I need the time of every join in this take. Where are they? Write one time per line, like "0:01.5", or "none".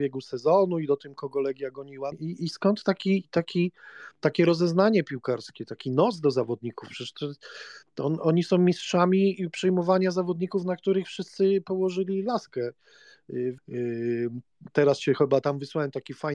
0:02.1
0:13.6